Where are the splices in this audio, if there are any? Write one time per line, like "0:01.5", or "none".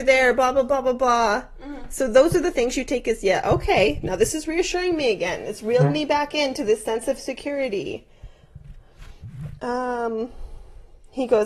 none